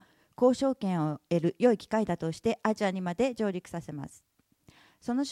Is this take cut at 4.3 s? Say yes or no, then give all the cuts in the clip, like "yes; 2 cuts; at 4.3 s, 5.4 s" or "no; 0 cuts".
no; 0 cuts